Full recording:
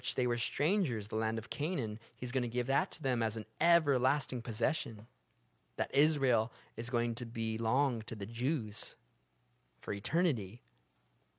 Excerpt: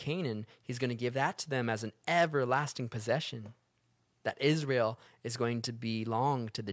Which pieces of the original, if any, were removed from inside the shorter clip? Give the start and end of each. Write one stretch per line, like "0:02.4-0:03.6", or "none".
none